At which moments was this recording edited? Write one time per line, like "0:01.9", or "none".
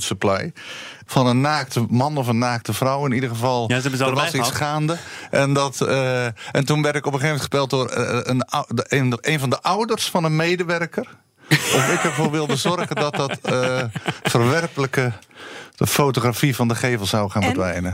0:01.1